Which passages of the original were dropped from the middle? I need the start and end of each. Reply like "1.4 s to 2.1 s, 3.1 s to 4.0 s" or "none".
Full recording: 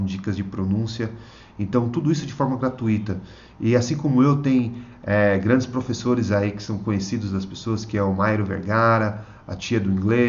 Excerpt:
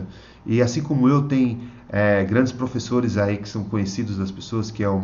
none